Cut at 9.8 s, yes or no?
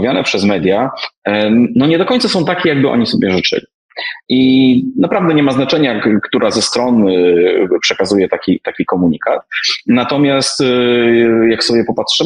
no